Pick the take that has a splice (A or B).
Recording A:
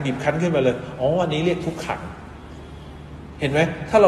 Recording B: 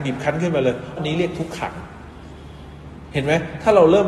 B